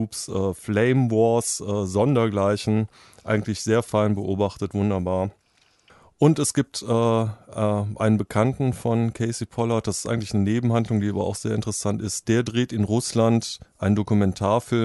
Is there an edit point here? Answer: no; 0 cuts

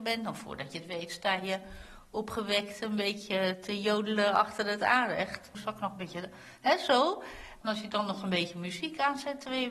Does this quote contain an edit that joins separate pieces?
yes; 2 cuts; at 5.5 s, 7.6 s

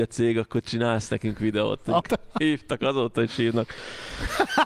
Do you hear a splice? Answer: yes; 1 cut; at 2.0 s

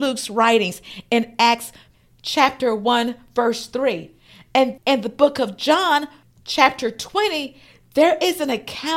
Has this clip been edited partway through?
yes; 1 cut; at 4.8 s

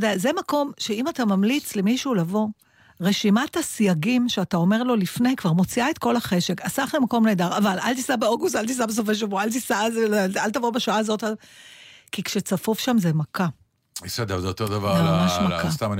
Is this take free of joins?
yes; 0 cuts

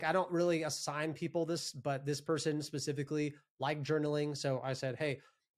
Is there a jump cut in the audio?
no; 0 cuts

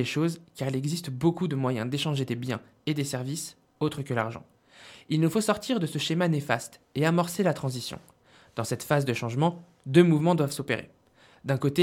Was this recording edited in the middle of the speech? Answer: no; 0 cuts

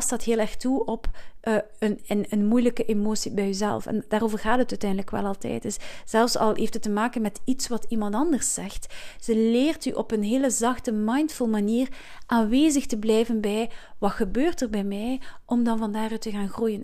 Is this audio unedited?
yes; 0 cuts

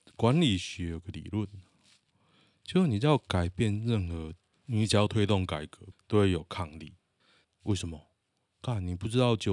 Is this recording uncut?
no; 3 cuts; at 4.5 s, 5.9 s, 7.4 s

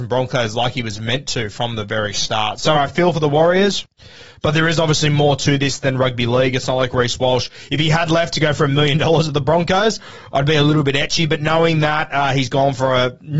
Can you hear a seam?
yes; 1 cut; at 2.7 s

